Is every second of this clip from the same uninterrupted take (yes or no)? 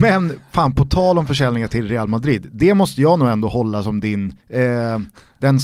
no